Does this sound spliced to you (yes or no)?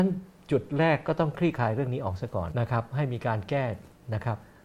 yes